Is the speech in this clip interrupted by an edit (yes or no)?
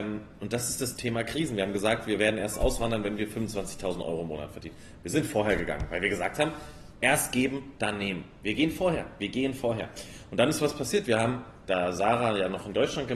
yes